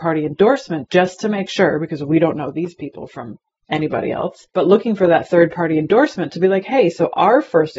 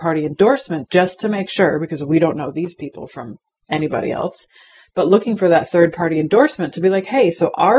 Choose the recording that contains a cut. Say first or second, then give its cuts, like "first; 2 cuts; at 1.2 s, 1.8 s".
first; 1 cut; at 4.5 s